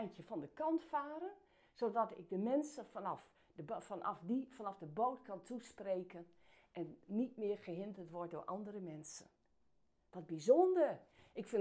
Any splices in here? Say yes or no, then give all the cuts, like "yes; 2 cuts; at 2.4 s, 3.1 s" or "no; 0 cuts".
yes; 1 cut; at 7.0 s